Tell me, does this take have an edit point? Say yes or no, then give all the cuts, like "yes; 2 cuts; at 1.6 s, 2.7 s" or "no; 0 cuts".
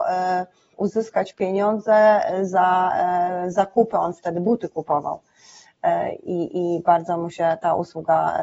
no; 0 cuts